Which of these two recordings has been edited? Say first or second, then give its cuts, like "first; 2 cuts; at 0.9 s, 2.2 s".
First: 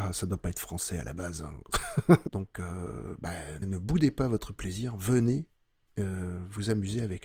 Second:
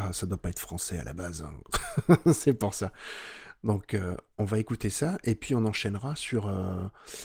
first; 2 cuts; at 2.3 s, 3.6 s